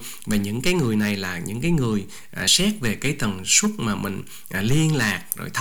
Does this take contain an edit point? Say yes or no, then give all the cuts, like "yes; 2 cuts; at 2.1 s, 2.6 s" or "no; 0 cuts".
no; 0 cuts